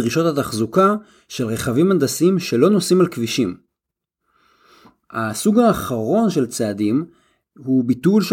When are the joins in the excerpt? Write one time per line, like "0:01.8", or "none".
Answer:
none